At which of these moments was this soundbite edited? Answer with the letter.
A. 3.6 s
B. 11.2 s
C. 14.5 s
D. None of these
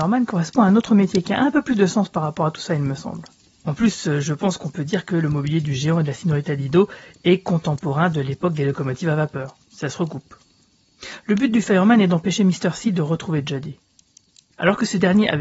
A